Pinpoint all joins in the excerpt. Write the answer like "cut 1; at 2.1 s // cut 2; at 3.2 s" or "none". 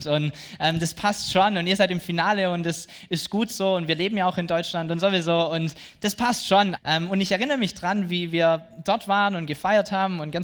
cut 1; at 6.8 s